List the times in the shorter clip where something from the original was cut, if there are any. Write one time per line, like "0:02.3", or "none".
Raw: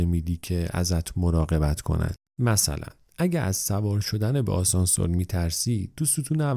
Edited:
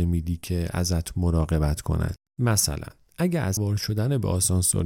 0:03.6